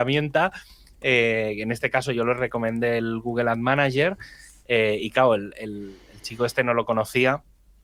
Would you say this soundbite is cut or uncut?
uncut